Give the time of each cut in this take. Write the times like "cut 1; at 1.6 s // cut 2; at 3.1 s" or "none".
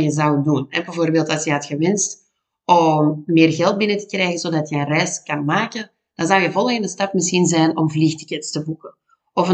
none